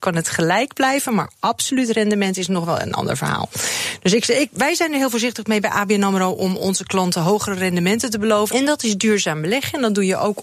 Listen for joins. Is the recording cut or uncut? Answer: cut